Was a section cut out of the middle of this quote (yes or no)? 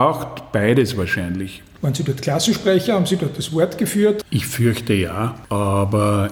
yes